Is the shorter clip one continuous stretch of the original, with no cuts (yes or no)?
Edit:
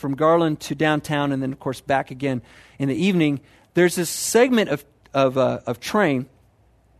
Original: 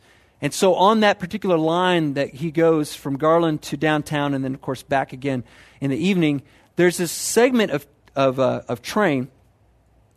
yes